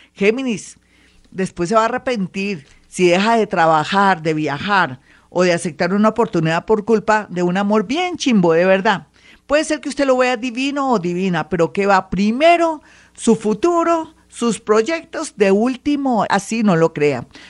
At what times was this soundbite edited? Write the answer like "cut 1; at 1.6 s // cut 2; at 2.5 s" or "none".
cut 1; at 16.3 s